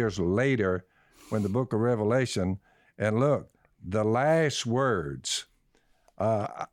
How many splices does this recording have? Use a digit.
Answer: 0